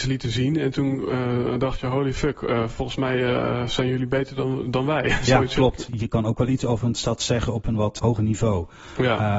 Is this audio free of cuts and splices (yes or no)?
no